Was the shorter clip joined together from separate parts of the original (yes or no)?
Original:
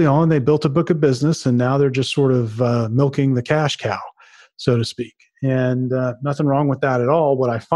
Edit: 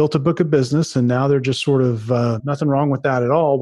yes